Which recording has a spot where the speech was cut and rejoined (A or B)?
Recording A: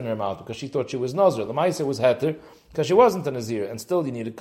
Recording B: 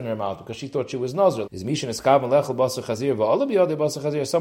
B